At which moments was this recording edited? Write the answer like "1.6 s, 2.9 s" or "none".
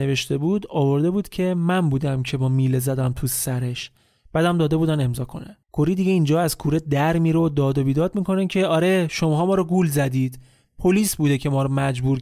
5.6 s